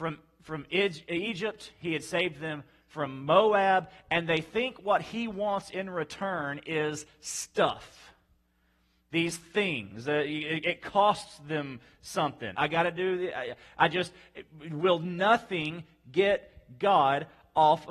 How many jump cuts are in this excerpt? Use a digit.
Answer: 1